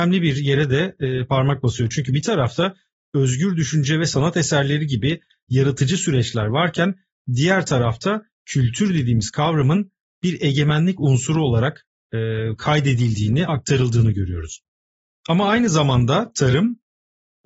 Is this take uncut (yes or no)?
no